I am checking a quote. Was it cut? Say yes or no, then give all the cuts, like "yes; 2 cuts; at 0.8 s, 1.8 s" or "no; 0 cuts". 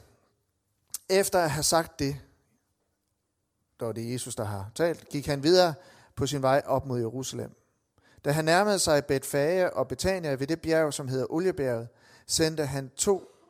no; 0 cuts